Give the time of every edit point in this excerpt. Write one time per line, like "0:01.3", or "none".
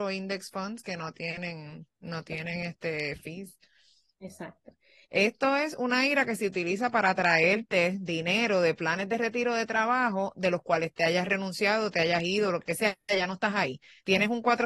0:05.0

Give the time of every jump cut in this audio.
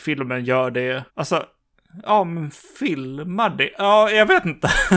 0:01.1

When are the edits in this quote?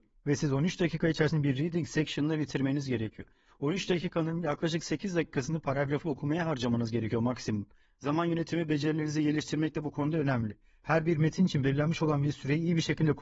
0:07.9

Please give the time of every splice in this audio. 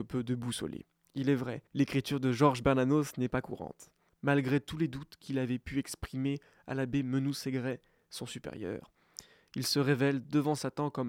0:01.7
0:04.1

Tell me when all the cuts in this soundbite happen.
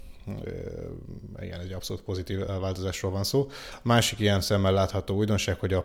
none

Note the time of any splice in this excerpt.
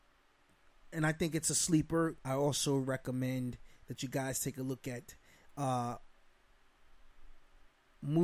0:02.2

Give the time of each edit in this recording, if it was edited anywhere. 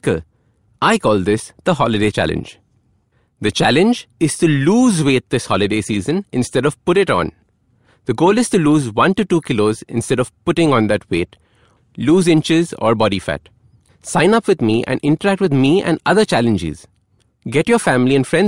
0:11.8
0:13.9

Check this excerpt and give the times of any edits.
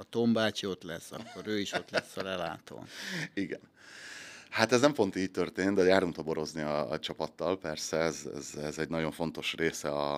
none

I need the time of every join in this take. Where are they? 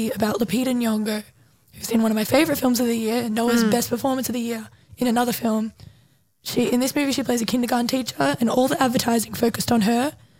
none

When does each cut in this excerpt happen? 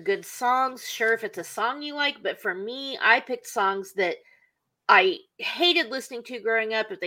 none

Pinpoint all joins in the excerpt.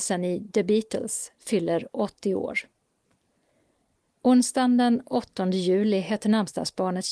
none

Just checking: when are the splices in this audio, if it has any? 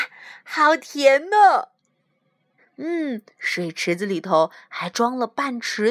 0:02.6

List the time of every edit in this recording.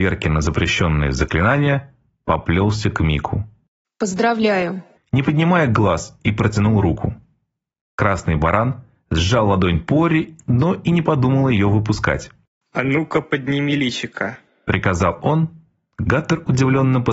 0:05.0

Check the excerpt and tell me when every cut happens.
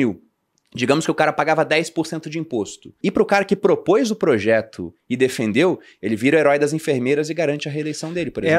0:03.0

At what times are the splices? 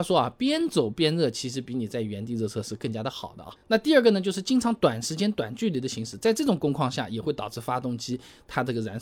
none

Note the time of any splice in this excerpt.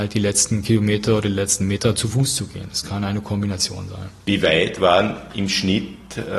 none

